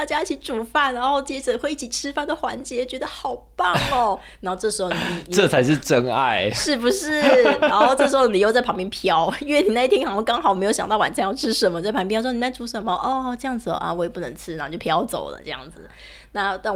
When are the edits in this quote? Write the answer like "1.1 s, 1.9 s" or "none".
none